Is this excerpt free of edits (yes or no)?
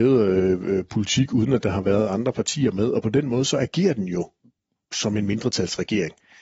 yes